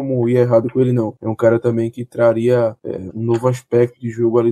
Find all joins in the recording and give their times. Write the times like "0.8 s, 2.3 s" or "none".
3.1 s

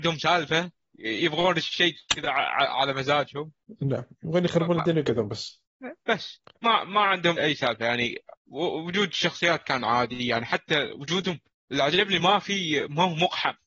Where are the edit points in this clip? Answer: 7.4 s, 12.2 s

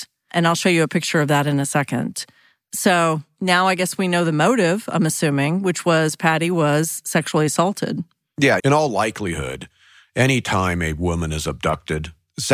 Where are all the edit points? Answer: 8.6 s

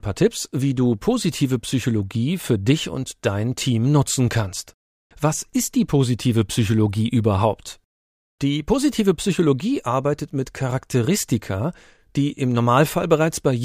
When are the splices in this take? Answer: 5.1 s

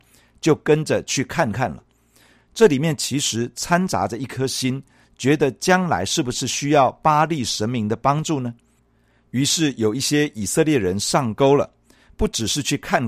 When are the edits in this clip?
none

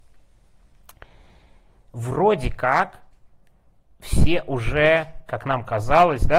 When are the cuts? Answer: none

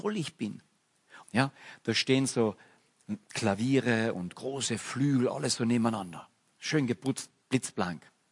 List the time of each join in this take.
1.2 s

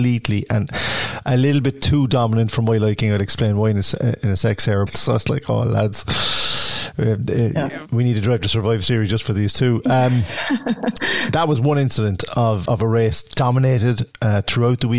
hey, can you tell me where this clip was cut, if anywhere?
4.9 s, 12.7 s

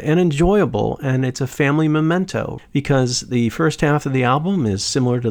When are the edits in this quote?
2.6 s

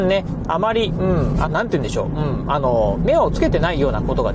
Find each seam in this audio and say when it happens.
1.4 s

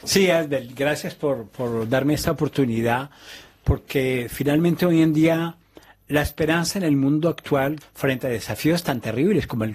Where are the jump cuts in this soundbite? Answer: 7.8 s

